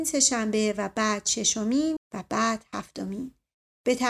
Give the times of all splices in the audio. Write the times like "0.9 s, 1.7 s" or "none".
2.0 s